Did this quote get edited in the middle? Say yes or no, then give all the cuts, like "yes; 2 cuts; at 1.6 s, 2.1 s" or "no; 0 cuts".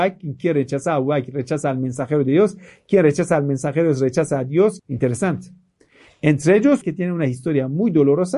yes; 2 cuts; at 4.8 s, 6.8 s